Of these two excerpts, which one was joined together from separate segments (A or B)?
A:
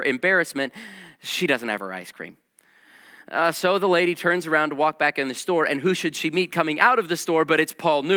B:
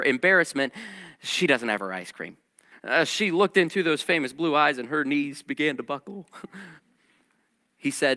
B